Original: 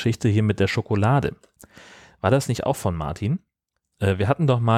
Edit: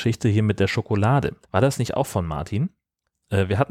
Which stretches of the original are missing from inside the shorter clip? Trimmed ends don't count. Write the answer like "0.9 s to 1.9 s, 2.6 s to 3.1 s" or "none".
1.4 s to 2.1 s